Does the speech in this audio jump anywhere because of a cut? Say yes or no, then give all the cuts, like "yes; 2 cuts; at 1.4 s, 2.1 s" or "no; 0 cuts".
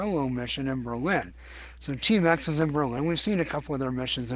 no; 0 cuts